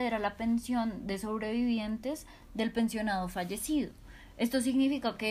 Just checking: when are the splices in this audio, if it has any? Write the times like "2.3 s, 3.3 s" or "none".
none

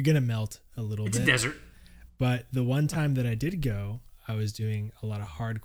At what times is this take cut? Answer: none

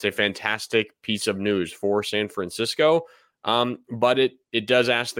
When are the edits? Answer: none

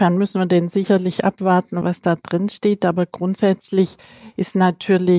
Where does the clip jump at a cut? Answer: 1.8 s

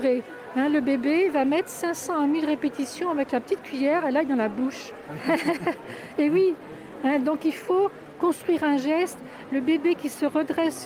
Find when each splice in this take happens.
5.2 s

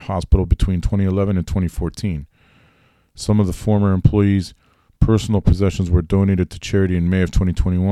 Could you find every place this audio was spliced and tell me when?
none

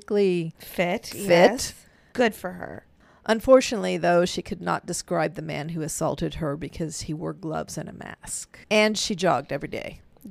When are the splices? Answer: 2.1 s, 8.6 s

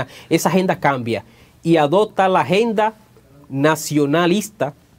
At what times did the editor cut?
none

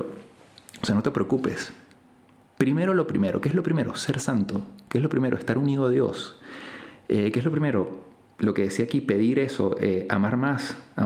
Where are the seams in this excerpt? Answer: none

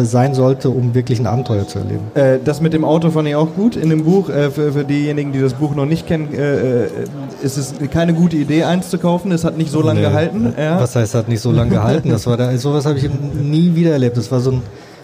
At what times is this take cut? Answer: 2.1 s

